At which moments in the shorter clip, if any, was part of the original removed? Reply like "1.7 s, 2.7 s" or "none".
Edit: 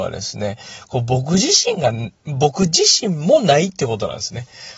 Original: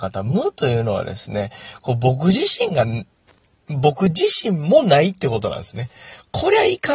2.2 s